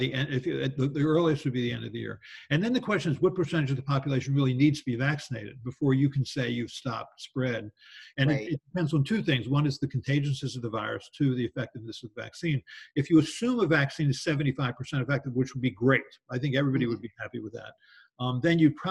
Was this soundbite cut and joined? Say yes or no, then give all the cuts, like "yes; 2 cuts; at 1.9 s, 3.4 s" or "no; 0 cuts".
no; 0 cuts